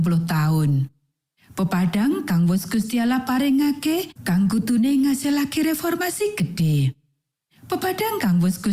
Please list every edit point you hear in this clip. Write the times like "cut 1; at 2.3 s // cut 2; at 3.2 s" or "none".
cut 1; at 1.3 s // cut 2; at 4.2 s